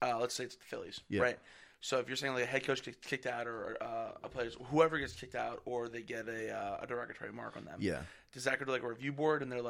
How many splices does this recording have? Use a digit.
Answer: 0